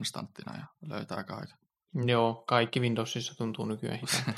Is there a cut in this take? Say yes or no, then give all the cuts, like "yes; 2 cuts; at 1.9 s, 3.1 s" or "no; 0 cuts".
no; 0 cuts